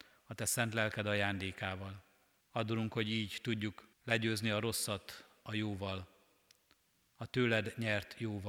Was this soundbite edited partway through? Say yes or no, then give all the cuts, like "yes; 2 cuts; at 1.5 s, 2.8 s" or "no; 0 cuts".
yes; 2 cuts; at 2.4 s, 3.9 s